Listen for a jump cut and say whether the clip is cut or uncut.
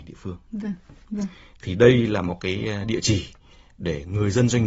cut